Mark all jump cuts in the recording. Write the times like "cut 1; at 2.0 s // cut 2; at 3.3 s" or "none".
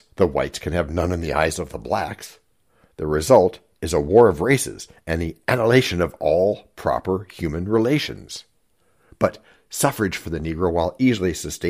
none